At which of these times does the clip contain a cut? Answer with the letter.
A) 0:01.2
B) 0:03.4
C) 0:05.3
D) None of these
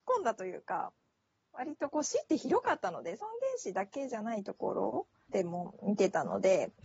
C